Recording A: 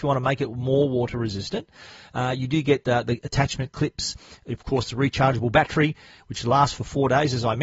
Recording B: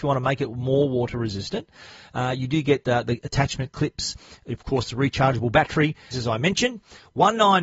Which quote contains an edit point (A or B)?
B